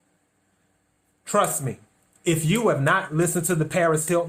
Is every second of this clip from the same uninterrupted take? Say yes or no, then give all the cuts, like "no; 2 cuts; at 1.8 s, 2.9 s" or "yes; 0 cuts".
yes; 0 cuts